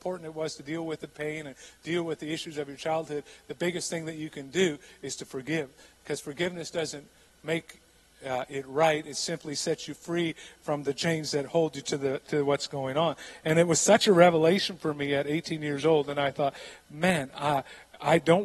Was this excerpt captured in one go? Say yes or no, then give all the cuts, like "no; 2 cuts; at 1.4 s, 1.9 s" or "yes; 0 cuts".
yes; 0 cuts